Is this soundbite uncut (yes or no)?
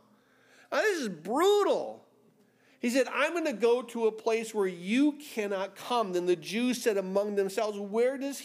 yes